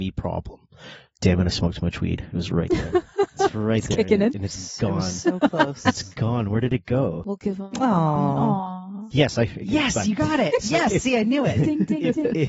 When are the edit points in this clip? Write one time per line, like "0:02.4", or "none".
none